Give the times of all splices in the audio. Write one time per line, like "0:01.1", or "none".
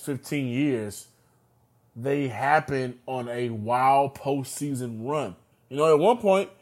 0:05.5